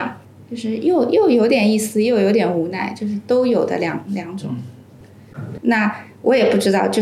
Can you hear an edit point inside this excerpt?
yes; 1 cut; at 5.6 s

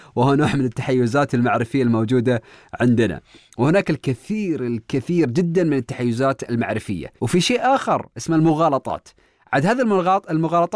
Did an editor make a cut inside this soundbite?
yes; 1 cut; at 7.2 s

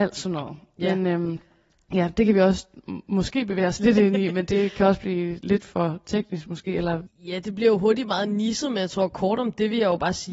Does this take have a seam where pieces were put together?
no; 0 cuts

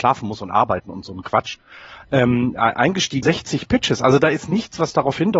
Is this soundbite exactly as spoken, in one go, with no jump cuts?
no; 1 cut; at 3.2 s

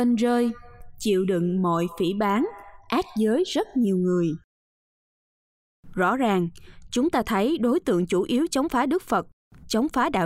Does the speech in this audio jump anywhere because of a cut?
no; 0 cuts

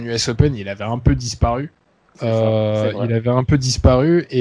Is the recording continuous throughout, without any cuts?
yes; 0 cuts

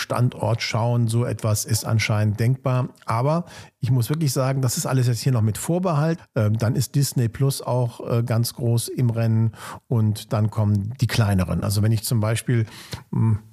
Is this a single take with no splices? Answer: no; 2 cuts; at 6.2 s, 11.6 s

